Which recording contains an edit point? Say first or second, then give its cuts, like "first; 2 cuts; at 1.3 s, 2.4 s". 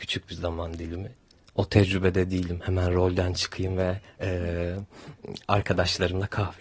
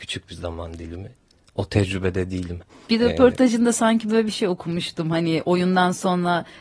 second; 1 cut; at 2.6 s